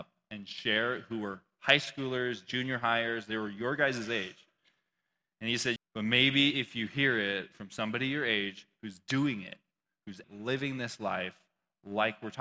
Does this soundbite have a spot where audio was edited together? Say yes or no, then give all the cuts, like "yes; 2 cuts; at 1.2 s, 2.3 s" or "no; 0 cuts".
yes; 2 cuts; at 5.8 s, 10.2 s